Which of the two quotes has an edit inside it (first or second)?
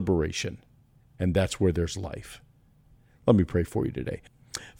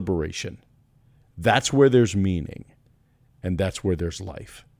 first